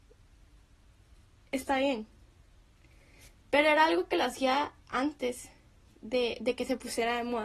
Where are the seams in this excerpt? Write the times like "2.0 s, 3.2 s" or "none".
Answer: 3.3 s

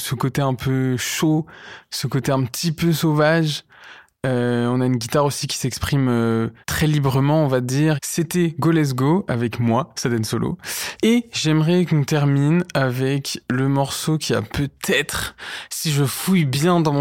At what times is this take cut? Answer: 6.6 s, 8.0 s, 11.0 s

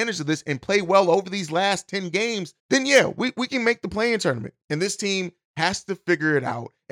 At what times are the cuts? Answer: 2.6 s, 4.6 s

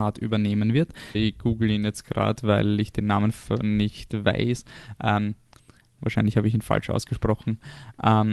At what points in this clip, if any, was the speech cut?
1.1 s, 6.0 s

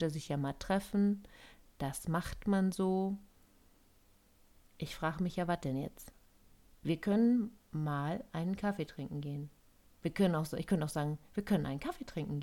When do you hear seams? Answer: none

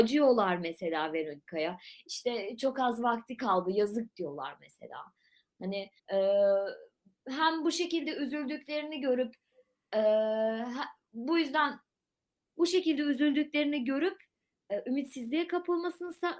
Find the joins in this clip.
6.0 s

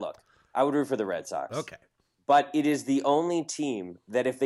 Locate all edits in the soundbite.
none

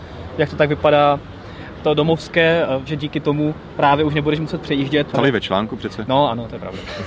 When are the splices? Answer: 1.7 s, 2.9 s, 5.1 s

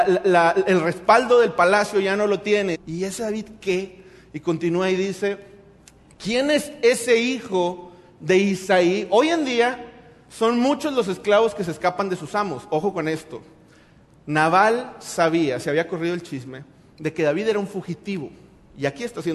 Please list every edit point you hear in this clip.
2.7 s

